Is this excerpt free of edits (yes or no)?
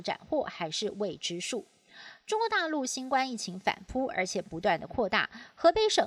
yes